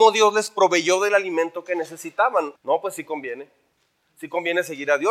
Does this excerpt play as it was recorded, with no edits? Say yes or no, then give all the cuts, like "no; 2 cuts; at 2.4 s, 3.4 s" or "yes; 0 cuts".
no; 1 cut; at 2.6 s